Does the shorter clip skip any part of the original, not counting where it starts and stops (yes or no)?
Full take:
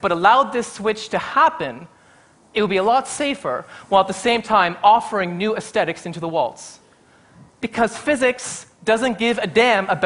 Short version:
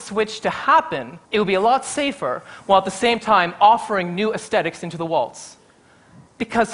yes